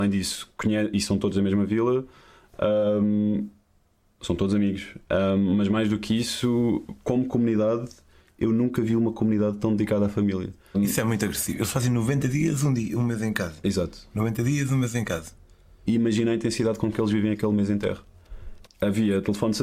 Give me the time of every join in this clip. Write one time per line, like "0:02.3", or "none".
0:10.7
0:18.7